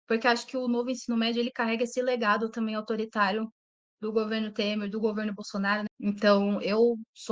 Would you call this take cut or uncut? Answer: cut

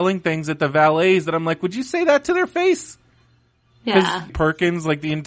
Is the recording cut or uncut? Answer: cut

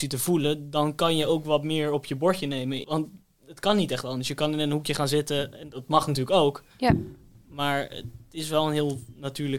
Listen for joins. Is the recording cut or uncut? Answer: cut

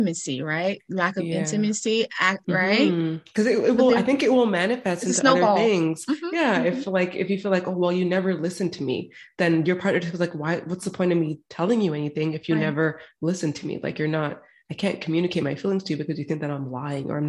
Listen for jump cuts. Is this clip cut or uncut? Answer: cut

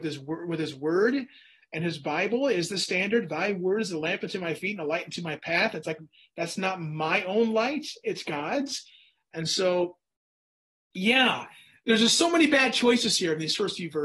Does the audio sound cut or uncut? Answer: uncut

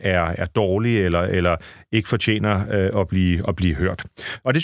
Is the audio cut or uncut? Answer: uncut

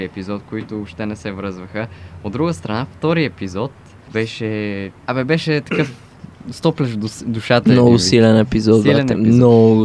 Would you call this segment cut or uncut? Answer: uncut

